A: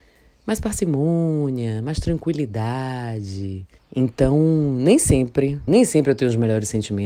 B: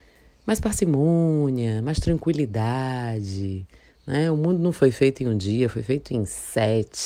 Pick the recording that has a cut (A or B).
A